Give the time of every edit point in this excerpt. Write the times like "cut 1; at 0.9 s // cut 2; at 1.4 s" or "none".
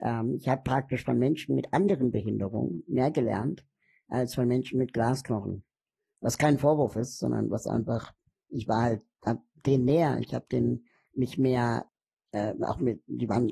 none